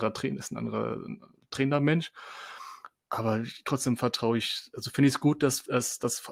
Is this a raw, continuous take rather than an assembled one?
yes; 0 cuts

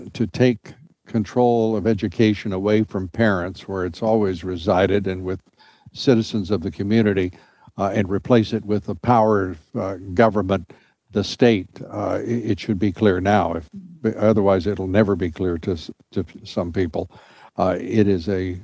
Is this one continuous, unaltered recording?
yes; 0 cuts

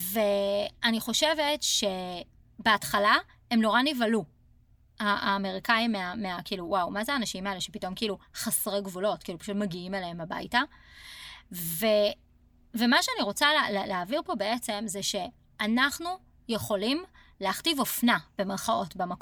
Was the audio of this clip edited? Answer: no; 0 cuts

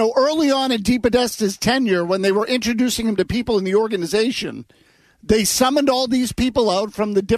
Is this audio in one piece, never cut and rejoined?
yes; 0 cuts

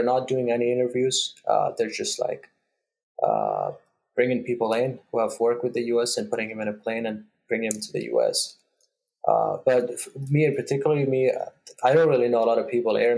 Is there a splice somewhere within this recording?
no; 0 cuts

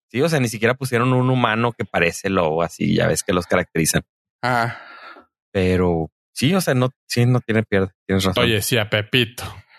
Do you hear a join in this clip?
no; 0 cuts

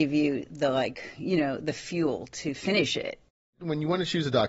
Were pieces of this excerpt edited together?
no; 0 cuts

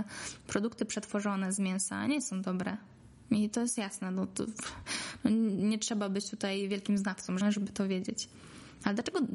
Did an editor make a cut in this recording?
yes; 1 cut; at 7.4 s

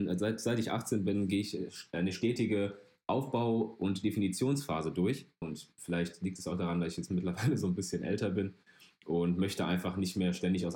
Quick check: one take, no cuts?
no; 1 cut; at 5.4 s

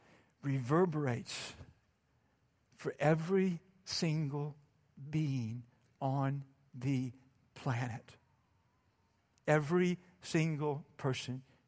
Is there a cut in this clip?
no; 0 cuts

